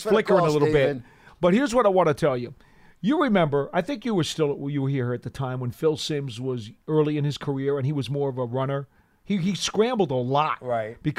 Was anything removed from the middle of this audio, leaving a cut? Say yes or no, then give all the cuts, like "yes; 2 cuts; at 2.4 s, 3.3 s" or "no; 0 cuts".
no; 0 cuts